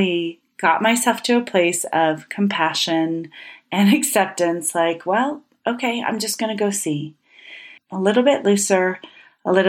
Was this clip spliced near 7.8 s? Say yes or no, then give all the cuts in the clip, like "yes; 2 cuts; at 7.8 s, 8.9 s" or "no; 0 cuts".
yes; 1 cut; at 7.8 s